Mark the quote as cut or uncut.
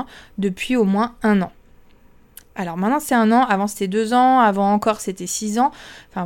uncut